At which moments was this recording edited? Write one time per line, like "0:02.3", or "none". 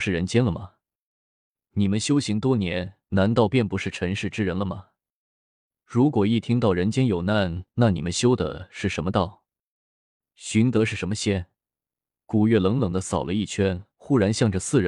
0:07.7